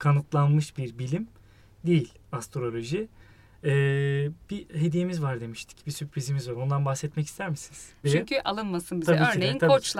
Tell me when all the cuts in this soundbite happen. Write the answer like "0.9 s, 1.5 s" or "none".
8.0 s